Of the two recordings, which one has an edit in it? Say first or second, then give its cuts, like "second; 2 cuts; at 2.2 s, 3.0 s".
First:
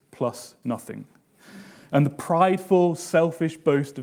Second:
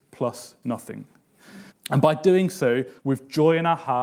second; 2 cuts; at 1.7 s, 3.0 s